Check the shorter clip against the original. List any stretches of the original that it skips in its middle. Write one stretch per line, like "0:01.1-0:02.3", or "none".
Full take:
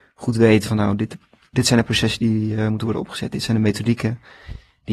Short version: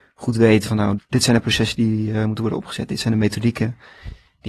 0:01.0-0:01.4